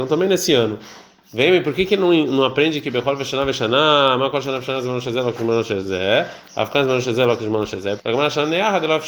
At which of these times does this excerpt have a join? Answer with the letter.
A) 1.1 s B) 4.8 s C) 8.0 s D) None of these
C